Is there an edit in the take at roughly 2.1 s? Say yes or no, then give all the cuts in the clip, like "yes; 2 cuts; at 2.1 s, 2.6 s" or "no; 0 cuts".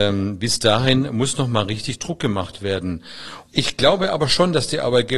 no; 1 cut; at 3.5 s